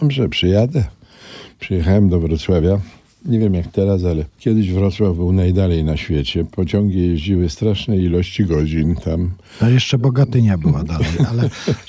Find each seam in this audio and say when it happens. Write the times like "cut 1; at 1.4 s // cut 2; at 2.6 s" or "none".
none